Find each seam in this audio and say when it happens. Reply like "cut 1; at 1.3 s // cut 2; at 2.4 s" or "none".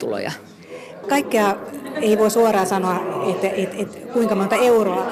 cut 1; at 1.0 s